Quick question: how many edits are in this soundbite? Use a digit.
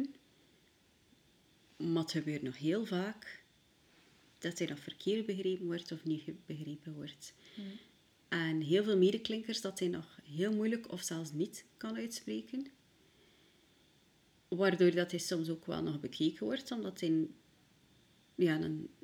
0